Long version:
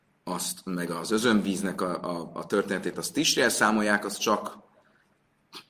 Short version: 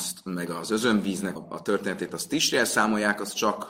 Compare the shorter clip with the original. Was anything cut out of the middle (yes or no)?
yes